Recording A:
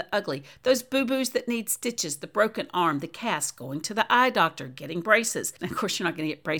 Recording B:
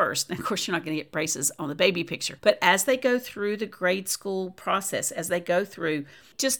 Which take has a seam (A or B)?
A